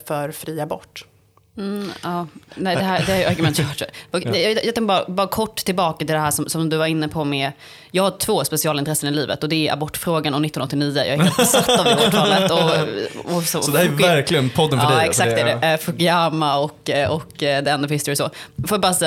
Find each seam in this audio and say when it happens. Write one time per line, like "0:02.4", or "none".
none